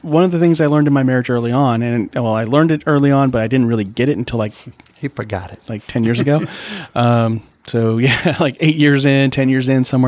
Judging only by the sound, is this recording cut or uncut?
uncut